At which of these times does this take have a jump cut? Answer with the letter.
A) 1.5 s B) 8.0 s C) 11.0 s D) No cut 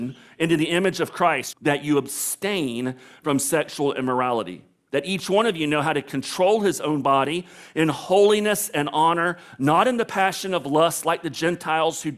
A